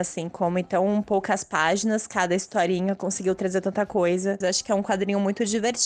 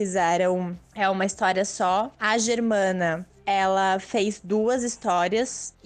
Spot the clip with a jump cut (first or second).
first